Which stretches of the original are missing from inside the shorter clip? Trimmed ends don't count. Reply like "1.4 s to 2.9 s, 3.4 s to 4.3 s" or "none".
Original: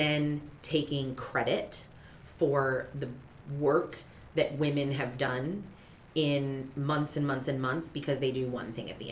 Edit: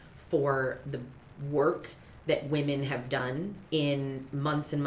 5.7 s to 6.1 s